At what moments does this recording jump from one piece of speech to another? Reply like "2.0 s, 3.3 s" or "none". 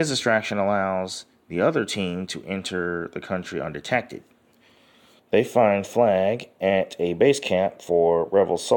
5.2 s